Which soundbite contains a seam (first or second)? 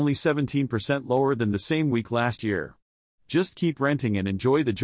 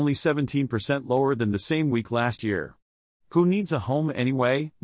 first